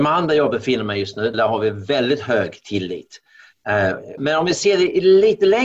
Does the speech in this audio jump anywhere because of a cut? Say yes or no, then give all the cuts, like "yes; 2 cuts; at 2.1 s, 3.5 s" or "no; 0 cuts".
yes; 2 cuts; at 1.3 s, 4.2 s